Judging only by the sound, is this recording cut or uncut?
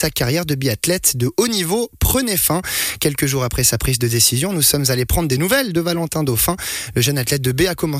uncut